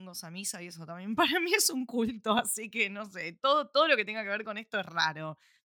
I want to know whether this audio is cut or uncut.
uncut